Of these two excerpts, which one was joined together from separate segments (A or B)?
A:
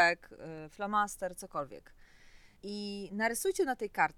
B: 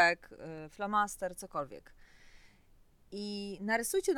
A